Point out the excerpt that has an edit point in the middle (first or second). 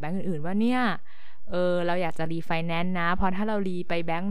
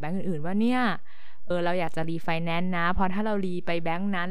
second